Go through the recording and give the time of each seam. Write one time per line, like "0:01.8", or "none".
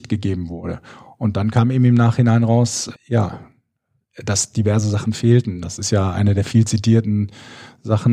0:02.9